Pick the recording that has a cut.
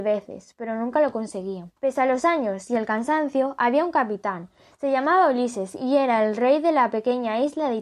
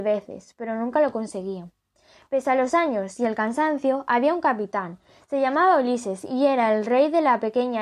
first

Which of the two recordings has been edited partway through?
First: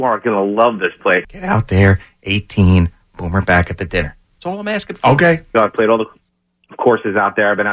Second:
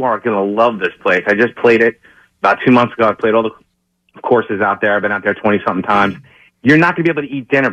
first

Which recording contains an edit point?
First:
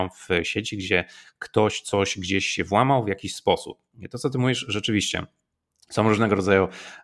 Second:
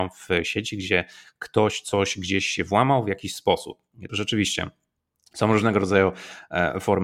second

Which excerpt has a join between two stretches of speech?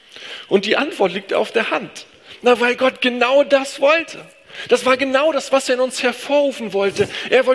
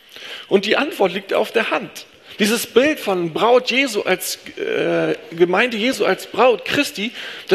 second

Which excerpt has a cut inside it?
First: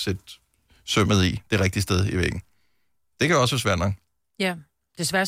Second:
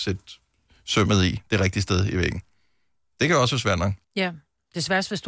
second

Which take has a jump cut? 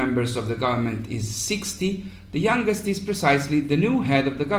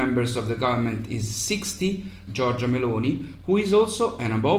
second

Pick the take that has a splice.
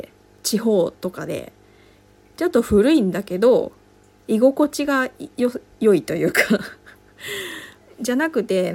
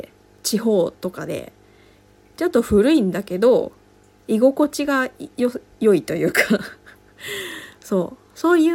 first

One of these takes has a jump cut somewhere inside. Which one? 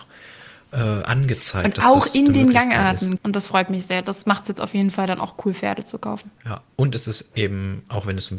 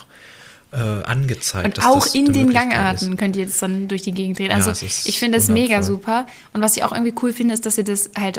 first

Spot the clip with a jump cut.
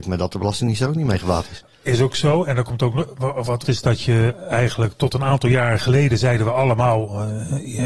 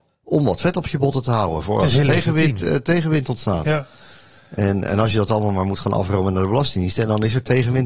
first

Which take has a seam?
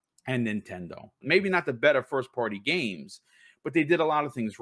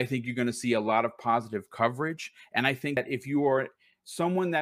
first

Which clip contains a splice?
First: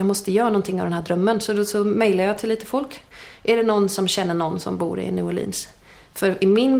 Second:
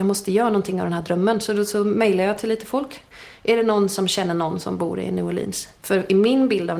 second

